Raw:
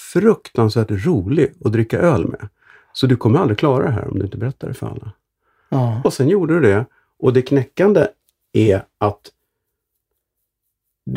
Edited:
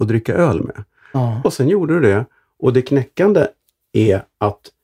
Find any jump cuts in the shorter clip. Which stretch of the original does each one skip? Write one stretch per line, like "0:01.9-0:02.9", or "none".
0:02.8-0:05.7